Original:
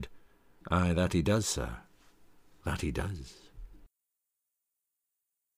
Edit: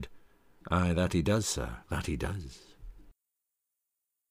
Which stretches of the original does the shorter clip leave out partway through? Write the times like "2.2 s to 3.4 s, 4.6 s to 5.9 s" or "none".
1.8 s to 2.6 s